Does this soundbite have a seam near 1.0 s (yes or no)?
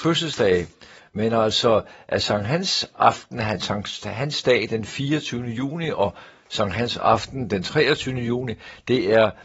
yes